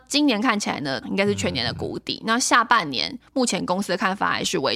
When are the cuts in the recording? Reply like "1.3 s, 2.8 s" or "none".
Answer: 1.0 s